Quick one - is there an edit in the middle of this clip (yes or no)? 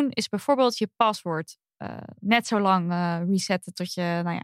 no